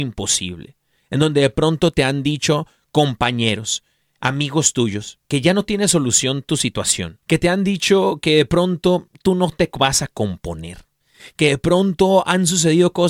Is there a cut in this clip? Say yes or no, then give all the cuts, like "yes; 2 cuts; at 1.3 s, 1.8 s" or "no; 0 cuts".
yes; 3 cuts; at 1.0 s, 5.2 s, 7.2 s